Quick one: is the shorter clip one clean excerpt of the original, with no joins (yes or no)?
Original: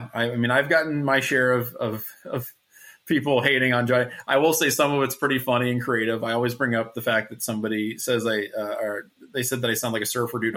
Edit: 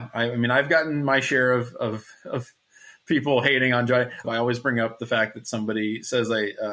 no